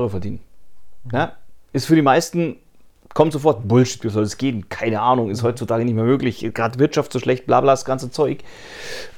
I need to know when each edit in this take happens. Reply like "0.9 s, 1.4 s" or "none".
none